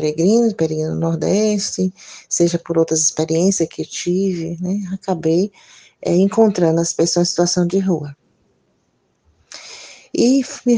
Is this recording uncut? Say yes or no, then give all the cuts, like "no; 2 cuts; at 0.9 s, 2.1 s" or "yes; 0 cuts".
yes; 0 cuts